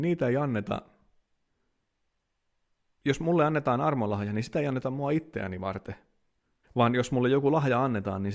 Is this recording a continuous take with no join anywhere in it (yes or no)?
no